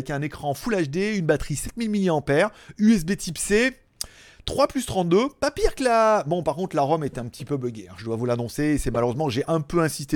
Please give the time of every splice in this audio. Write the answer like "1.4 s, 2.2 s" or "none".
none

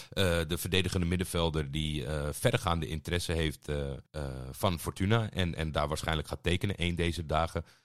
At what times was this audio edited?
4.1 s

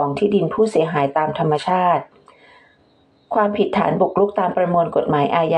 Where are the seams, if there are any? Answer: none

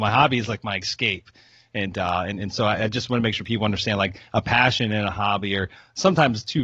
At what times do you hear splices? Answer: none

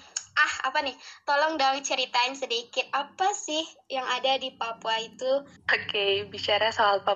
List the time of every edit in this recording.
5.6 s

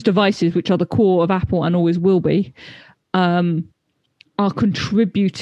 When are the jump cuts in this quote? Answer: none

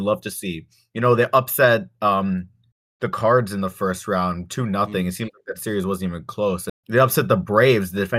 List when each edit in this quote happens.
6.7 s

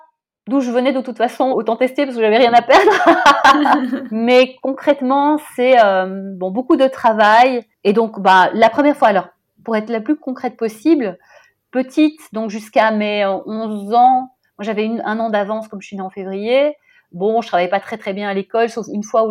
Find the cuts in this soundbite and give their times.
1.5 s

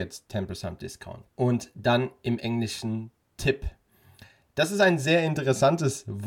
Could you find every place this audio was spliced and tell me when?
1.3 s

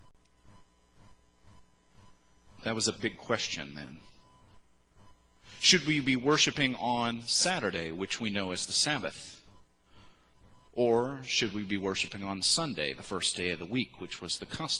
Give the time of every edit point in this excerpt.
2.6 s

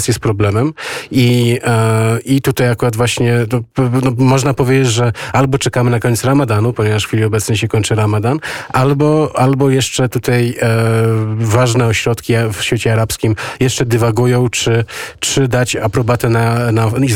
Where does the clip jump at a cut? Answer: none

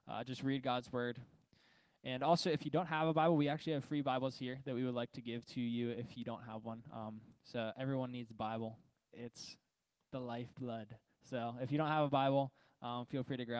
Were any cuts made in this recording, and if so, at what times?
none

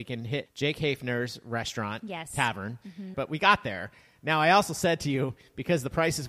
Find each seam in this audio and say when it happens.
3.1 s

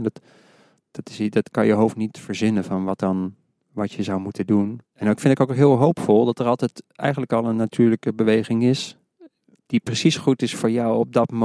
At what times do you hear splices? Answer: 4.8 s

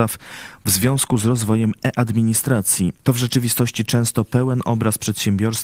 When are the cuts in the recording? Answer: 3.0 s

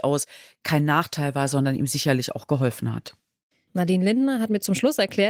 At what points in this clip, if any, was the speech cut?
3.7 s

